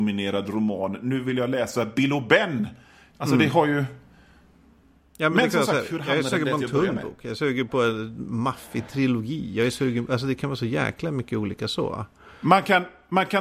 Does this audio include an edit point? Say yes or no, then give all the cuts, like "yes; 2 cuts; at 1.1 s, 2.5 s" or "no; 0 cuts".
no; 0 cuts